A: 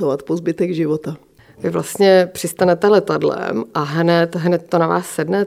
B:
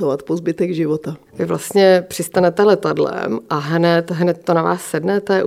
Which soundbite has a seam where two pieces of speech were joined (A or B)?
B